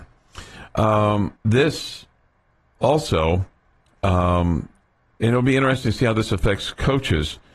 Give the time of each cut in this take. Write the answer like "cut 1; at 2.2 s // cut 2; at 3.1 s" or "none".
cut 1; at 1.4 s